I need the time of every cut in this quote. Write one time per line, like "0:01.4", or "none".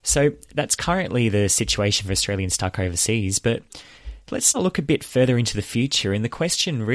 0:04.5